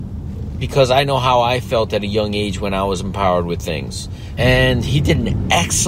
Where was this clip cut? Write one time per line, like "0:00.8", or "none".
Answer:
0:04.4